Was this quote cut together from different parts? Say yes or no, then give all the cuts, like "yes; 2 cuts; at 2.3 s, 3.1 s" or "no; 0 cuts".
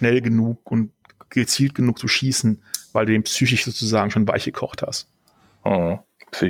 no; 0 cuts